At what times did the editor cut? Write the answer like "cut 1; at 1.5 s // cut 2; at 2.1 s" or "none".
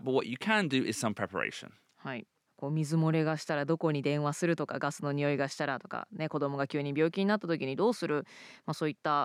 cut 1; at 2.5 s